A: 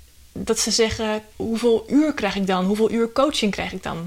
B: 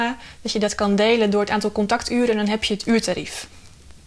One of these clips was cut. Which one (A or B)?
A